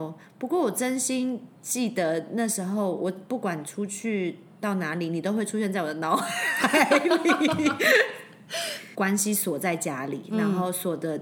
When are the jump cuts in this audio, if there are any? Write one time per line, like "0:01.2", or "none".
0:01.6
0:08.9